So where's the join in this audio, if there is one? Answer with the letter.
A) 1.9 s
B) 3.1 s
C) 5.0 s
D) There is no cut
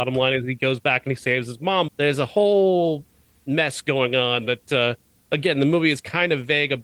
A